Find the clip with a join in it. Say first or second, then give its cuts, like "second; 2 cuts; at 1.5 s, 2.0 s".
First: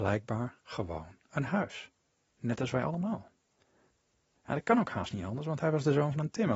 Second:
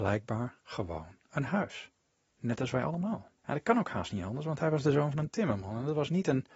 second; 1 cut; at 3.4 s